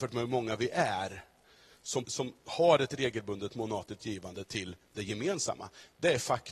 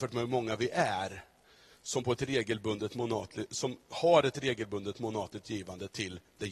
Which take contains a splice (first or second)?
first